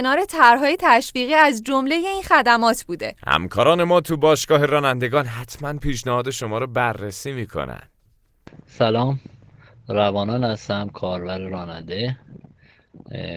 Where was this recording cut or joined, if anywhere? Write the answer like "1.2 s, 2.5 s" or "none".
none